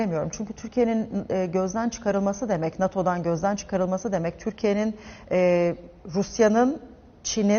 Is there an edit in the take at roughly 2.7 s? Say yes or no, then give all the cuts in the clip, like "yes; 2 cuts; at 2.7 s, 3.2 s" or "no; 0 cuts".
no; 0 cuts